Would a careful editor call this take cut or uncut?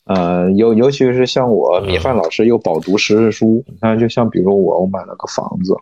cut